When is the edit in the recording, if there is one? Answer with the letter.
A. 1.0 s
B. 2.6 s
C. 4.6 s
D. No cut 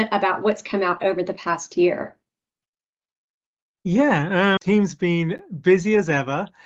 C